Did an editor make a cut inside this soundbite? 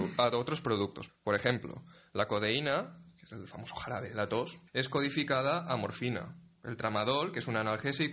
yes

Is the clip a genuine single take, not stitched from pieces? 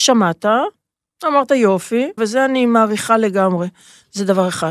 no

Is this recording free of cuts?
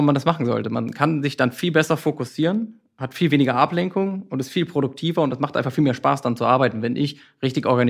yes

